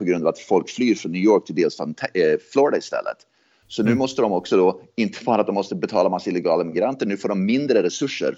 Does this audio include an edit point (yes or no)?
no